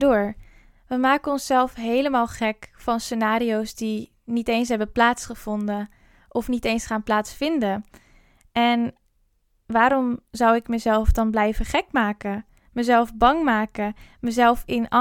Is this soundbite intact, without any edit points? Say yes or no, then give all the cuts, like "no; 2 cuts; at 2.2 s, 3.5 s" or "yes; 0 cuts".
yes; 0 cuts